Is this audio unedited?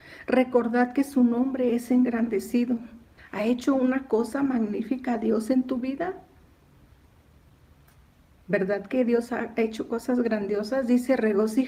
no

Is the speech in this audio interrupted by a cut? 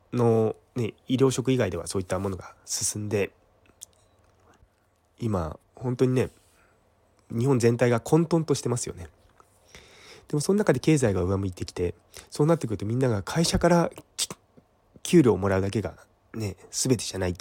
no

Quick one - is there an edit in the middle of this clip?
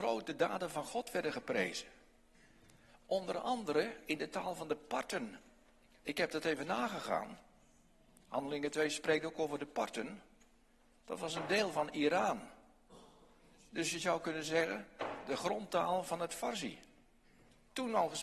no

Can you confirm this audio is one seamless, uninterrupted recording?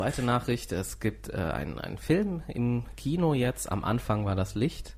yes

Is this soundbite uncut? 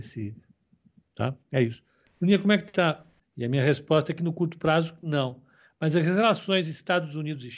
no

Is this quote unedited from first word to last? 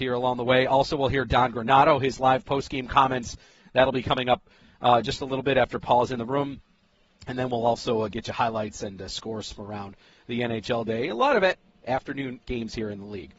yes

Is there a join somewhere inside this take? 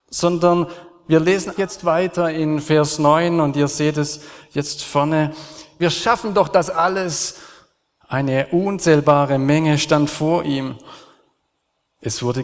yes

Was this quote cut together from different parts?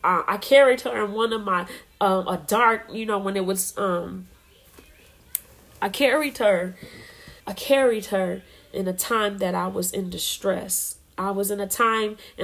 yes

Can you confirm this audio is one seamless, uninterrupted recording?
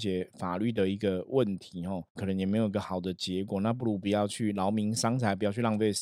no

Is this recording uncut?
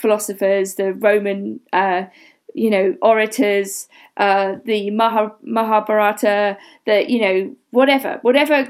yes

